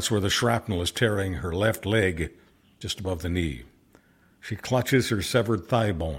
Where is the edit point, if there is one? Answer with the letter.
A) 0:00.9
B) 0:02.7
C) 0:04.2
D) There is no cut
D